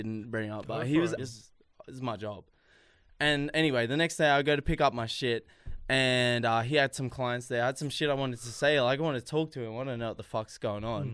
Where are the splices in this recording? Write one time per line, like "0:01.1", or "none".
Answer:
0:01.2